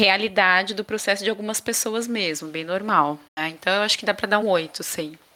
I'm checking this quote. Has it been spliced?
yes; 2 cuts; at 3.3 s, 4.4 s

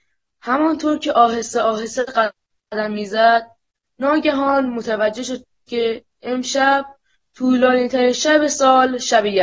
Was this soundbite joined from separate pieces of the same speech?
no; 0 cuts

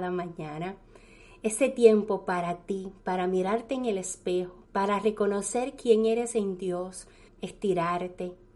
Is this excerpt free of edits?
no; 2 cuts; at 4.6 s, 7.3 s

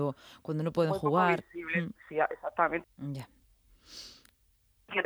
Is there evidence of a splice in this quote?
yes; 1 cut; at 2.8 s

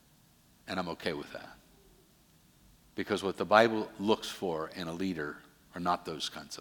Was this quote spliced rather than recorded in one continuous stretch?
no; 0 cuts

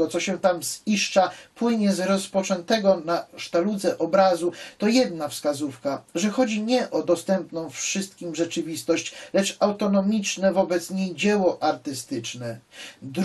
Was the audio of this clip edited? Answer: no; 0 cuts

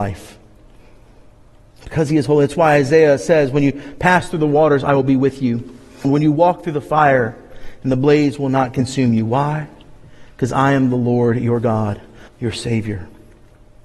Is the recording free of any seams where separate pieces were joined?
no; 2 cuts; at 6.0 s, 12.3 s

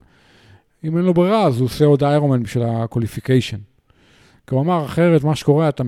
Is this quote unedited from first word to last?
yes; 0 cuts

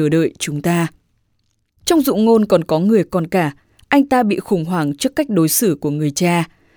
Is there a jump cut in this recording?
no; 0 cuts

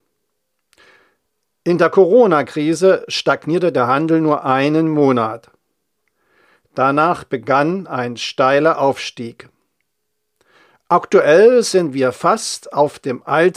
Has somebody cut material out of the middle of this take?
no; 0 cuts

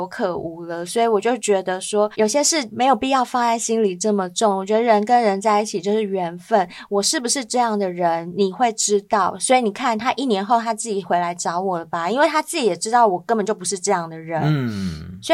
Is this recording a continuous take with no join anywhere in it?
yes; 0 cuts

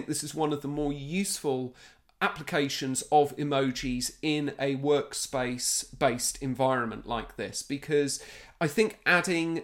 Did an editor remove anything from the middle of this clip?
no; 0 cuts

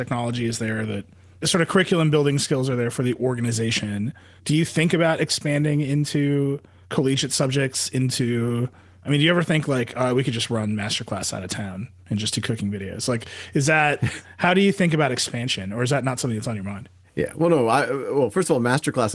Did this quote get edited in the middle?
no; 0 cuts

